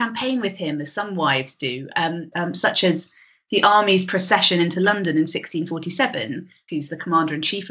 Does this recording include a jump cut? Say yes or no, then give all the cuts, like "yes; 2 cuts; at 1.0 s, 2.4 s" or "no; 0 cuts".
yes; 2 cuts; at 2.3 s, 6.7 s